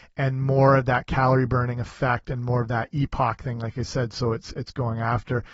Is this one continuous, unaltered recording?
yes; 0 cuts

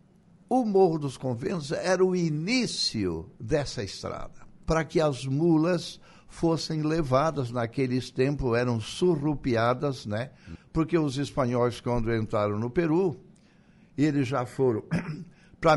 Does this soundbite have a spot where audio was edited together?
yes; 2 cuts; at 4.6 s, 10.5 s

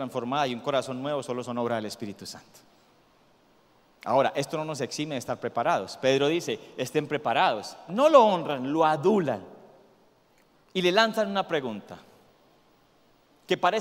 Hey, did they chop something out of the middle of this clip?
yes; 1 cut; at 7.9 s

